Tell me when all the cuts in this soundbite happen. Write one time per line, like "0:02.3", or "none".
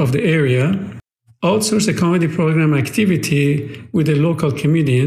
none